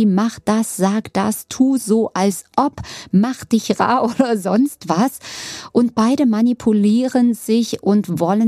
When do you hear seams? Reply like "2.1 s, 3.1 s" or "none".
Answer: none